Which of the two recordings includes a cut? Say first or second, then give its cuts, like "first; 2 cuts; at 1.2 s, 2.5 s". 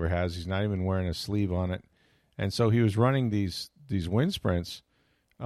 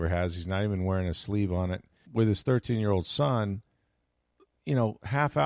second; 1 cut; at 2.1 s